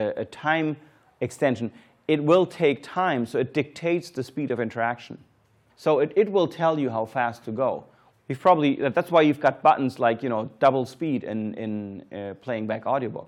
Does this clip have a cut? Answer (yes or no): yes